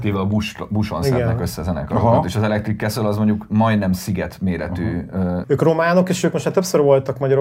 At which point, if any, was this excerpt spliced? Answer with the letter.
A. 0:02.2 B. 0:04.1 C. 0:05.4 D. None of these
C